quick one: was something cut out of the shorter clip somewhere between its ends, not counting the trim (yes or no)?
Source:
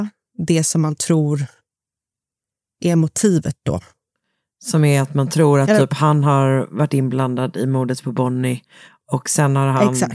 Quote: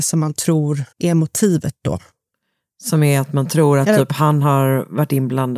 yes